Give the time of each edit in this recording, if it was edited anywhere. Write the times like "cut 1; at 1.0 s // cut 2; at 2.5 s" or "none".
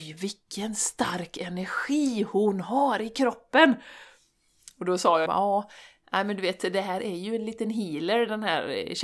cut 1; at 5.3 s